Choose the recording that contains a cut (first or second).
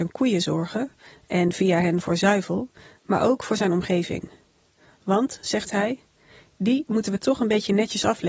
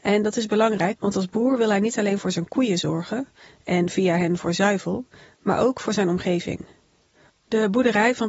second